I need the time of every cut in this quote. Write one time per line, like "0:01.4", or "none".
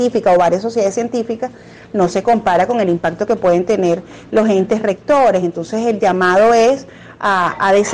none